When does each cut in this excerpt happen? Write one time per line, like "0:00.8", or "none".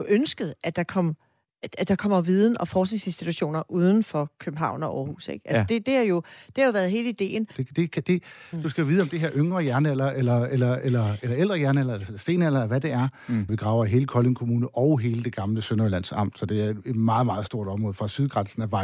0:07.5
0:13.5